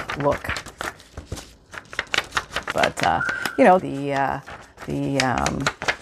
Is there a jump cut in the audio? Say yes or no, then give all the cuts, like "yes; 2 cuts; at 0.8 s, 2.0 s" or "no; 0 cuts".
yes; 2 cuts; at 2.7 s, 3.8 s